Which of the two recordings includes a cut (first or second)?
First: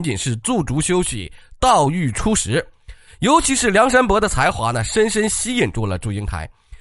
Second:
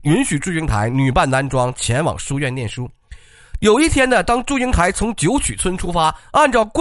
first